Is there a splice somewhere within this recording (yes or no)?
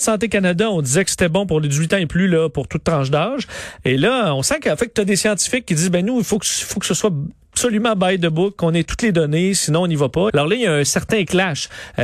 yes